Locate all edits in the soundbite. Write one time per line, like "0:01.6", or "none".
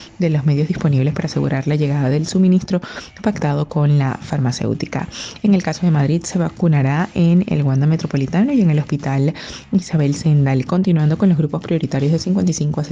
none